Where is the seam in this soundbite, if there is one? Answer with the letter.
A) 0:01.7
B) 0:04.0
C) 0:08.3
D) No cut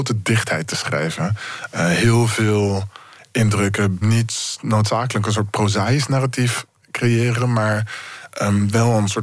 B